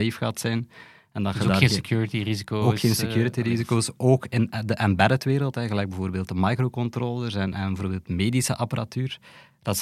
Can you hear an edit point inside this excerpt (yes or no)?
no